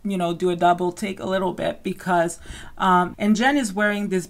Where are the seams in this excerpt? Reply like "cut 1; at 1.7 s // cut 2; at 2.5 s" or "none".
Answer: cut 1; at 3.1 s